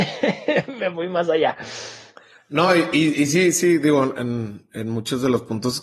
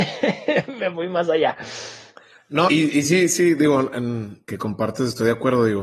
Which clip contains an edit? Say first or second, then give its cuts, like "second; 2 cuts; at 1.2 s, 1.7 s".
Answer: second; 2 cuts; at 2.7 s, 4.4 s